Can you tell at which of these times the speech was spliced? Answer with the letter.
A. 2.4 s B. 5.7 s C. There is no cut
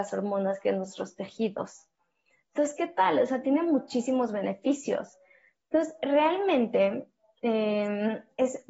C